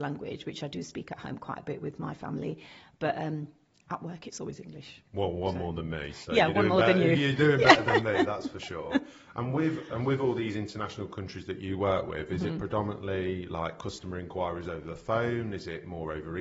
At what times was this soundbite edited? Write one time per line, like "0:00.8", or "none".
none